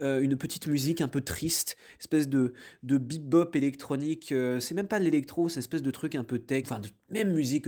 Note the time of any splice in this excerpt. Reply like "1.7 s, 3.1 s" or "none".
6.6 s